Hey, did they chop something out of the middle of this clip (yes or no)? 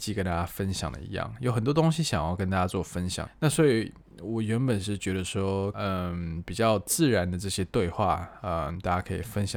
yes